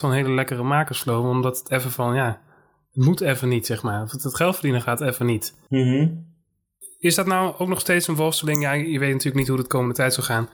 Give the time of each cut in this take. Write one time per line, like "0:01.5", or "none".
none